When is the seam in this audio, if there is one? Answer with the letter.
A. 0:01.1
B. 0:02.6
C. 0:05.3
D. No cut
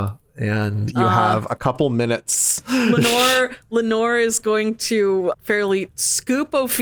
C